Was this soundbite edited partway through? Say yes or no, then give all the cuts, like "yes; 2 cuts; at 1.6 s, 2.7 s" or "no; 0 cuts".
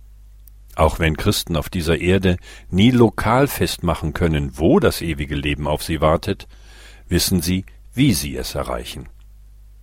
no; 0 cuts